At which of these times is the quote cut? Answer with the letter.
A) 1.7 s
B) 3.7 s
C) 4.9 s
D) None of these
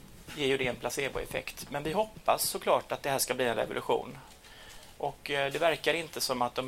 C